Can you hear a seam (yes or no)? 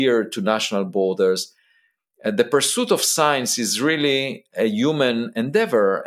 no